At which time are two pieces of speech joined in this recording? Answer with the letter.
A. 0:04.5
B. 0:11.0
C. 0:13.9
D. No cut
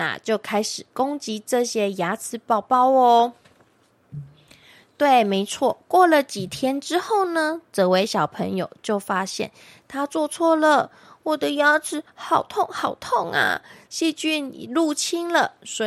C